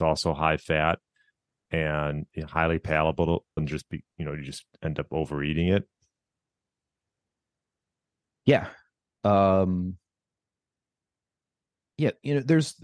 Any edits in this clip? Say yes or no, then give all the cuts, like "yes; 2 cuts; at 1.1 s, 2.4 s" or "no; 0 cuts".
yes; 1 cut; at 3.6 s